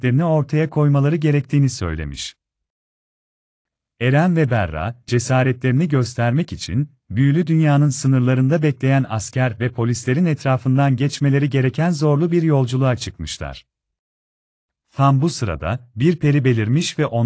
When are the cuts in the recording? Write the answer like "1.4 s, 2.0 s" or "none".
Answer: 14.8 s